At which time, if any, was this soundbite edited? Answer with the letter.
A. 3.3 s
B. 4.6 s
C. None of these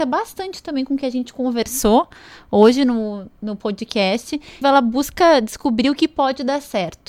B